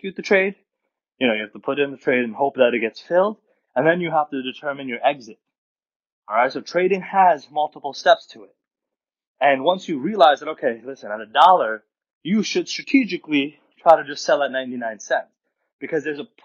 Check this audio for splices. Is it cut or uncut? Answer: cut